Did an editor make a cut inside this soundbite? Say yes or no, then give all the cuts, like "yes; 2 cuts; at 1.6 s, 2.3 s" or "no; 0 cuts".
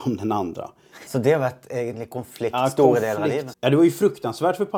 yes; 2 cuts; at 1.1 s, 3.5 s